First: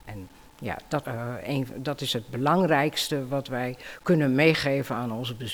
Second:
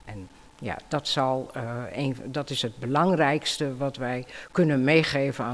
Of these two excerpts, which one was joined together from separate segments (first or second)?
first